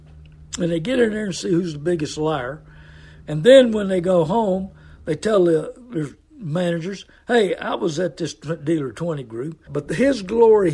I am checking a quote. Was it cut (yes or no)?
yes